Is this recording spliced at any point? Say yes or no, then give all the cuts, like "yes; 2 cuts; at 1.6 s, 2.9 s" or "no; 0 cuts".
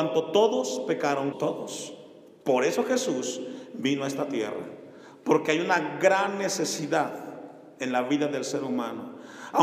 yes; 1 cut; at 1.3 s